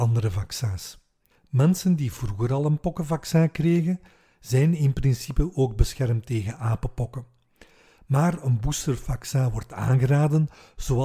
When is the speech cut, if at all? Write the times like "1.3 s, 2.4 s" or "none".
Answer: 1.3 s